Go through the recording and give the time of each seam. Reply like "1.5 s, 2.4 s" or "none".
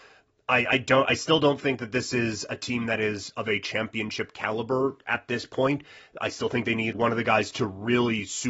6.9 s